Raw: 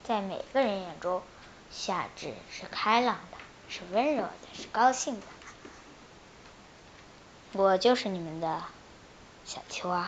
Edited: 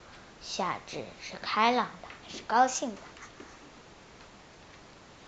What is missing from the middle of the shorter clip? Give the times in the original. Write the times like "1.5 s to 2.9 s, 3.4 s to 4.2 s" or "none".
3.5 s to 4.5 s